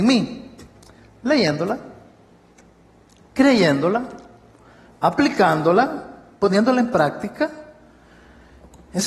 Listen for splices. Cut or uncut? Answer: uncut